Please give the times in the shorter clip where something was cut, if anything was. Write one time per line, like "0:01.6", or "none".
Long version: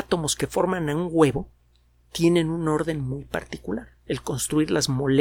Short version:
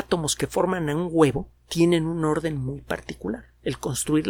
0:01.6